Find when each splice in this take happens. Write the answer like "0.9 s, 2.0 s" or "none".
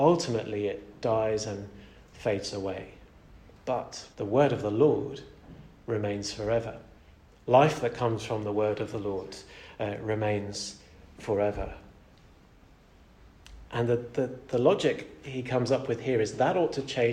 4.1 s